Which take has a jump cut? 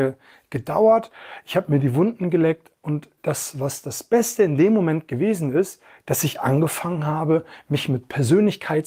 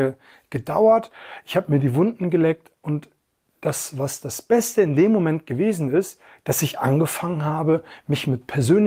first; 1 cut; at 3.2 s

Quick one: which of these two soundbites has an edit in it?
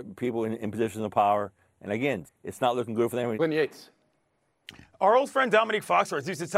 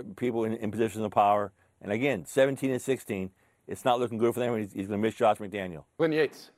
first; 2 cuts; at 2.3 s, 3.3 s

